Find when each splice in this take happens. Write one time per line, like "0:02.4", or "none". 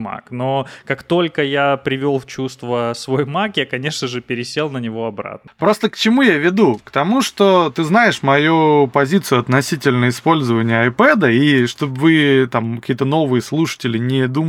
none